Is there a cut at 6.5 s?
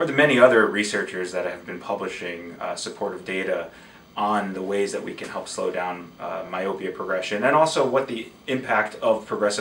no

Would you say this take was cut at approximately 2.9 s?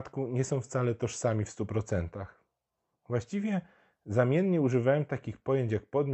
yes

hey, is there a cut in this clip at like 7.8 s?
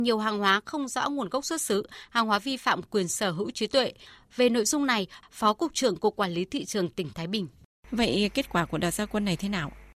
yes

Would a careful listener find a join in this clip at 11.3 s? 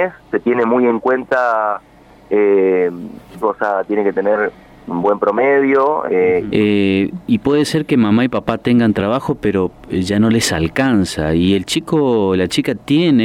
no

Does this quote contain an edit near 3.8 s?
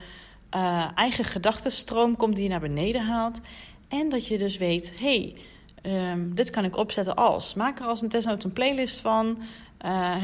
no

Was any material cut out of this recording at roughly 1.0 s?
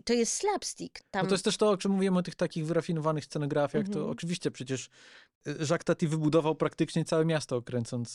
yes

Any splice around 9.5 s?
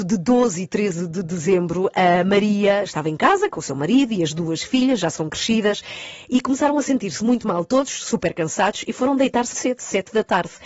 yes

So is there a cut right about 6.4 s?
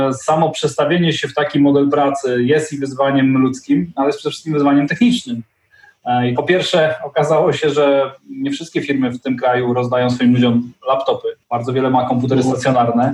yes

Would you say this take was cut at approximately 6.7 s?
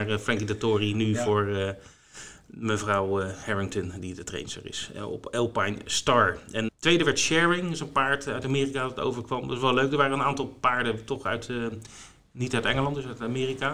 yes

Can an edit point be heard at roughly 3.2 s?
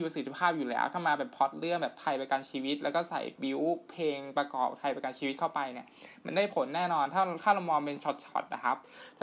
no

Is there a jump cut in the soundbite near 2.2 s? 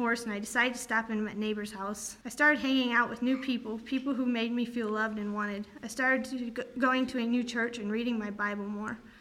yes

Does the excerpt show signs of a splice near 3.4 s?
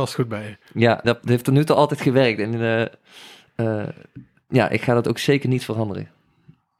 no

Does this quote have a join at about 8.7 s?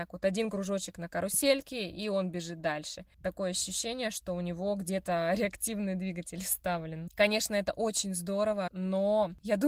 yes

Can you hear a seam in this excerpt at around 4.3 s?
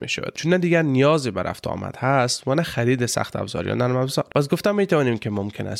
yes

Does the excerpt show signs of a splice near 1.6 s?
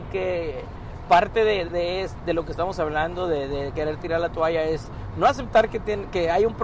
yes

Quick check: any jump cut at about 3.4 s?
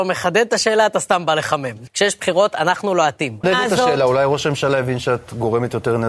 yes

